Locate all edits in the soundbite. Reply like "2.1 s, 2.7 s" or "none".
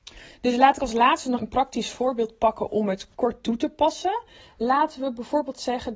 1.4 s